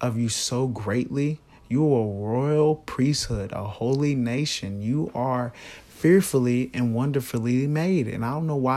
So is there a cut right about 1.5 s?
no; 0 cuts

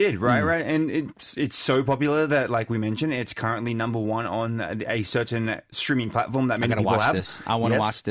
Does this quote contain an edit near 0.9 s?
no; 0 cuts

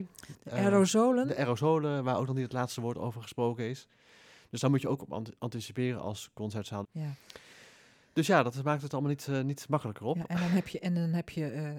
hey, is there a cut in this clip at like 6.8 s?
yes; 1 cut; at 6.8 s

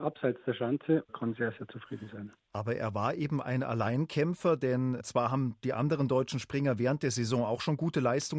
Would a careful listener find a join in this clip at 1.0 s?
yes; 1 cut; at 1.0 s

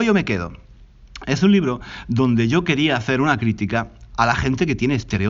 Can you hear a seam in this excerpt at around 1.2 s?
no; 1 cut; at 4.1 s

